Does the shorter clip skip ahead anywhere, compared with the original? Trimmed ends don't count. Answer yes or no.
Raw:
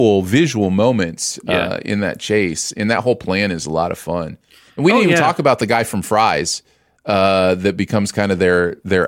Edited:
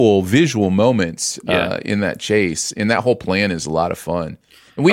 no